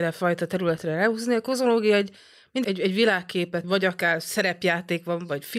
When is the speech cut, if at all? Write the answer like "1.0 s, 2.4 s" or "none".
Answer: 2.6 s, 3.6 s